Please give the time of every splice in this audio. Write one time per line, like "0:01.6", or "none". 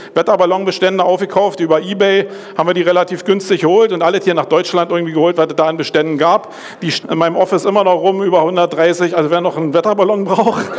0:07.0